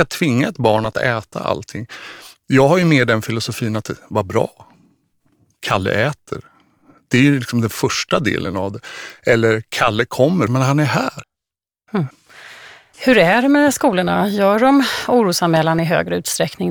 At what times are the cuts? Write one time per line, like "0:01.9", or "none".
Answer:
0:10.5